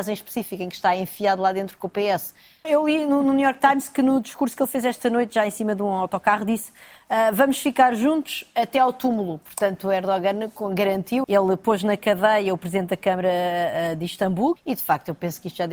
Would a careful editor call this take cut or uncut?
cut